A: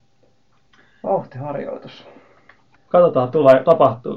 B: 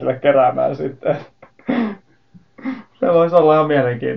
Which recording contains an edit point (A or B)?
A